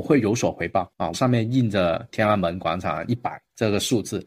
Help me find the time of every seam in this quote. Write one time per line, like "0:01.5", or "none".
0:01.1
0:03.1